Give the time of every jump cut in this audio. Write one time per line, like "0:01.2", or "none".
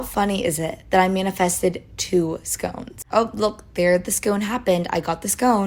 0:03.1